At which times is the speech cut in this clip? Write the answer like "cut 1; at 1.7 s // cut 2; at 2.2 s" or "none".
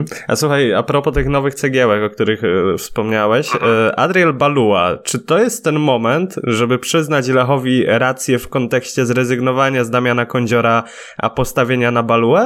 none